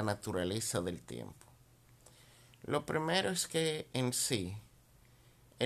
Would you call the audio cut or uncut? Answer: uncut